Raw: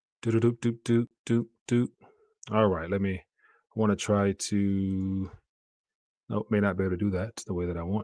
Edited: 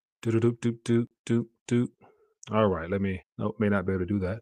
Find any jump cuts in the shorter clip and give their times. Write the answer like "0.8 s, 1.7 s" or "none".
3.2 s